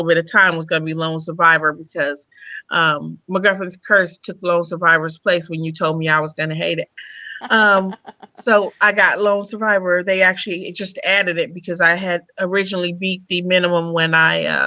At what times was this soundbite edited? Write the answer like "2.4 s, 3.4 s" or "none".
none

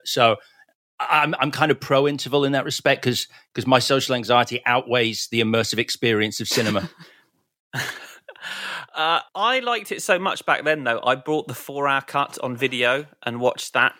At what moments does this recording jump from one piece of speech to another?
9.3 s

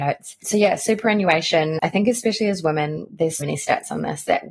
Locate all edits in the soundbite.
3.4 s

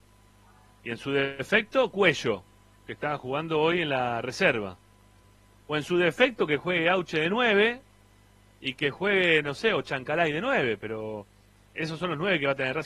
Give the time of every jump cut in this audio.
5.6 s, 11.8 s

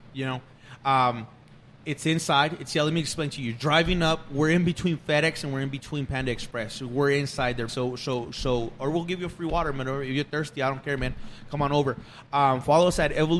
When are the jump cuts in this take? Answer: 7.7 s

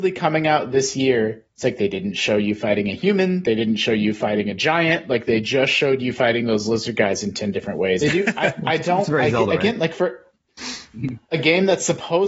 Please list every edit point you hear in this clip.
8.0 s

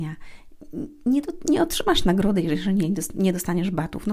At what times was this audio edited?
none

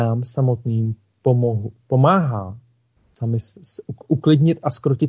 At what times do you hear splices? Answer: none

